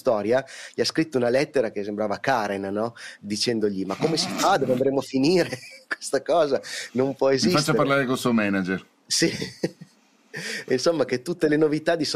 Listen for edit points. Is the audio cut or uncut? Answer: uncut